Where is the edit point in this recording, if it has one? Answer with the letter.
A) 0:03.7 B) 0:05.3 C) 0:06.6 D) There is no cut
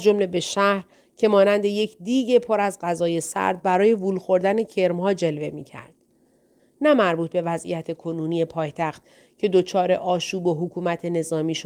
C